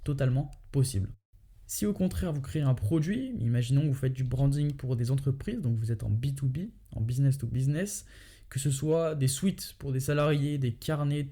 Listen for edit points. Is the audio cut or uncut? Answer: uncut